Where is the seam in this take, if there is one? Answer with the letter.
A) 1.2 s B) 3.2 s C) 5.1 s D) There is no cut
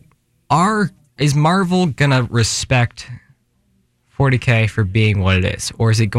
A